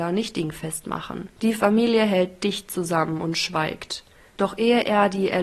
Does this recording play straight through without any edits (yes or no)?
no